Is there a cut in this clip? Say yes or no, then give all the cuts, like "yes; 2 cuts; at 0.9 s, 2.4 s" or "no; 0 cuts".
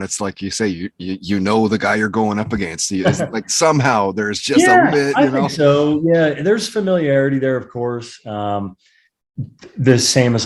yes; 1 cut; at 4.9 s